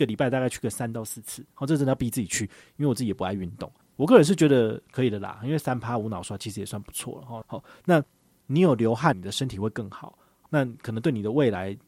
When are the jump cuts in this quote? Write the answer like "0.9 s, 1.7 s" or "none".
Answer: 3.8 s, 7.4 s, 9.1 s